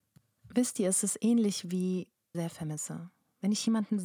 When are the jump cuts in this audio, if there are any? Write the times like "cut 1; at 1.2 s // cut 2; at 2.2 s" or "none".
cut 1; at 2.3 s